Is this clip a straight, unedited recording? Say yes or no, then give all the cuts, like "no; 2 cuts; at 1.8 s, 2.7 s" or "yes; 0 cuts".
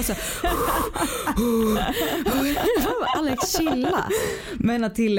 yes; 0 cuts